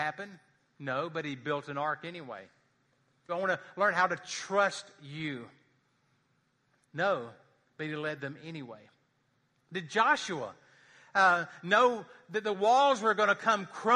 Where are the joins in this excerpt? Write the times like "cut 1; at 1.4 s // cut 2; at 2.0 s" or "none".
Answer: cut 1; at 3.3 s // cut 2; at 6.8 s